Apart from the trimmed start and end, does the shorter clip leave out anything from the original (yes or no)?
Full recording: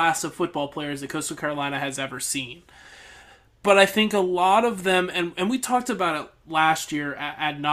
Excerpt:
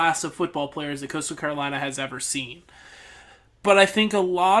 no